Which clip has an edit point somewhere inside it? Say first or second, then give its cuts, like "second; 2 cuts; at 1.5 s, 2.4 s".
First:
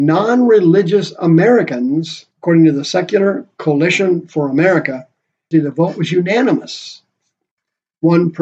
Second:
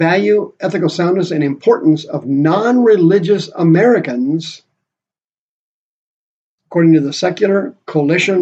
first; 2 cuts; at 2.3 s, 5.5 s